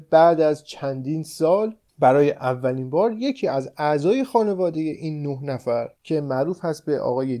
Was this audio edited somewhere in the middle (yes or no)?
yes